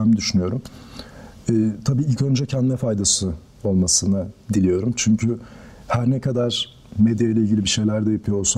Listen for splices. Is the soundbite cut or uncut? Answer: uncut